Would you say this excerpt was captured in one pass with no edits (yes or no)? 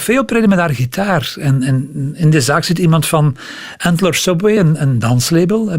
yes